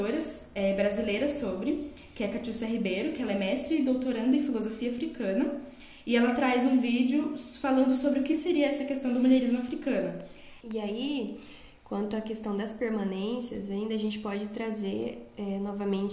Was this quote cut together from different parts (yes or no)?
yes